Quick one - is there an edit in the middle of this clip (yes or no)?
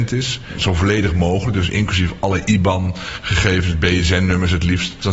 no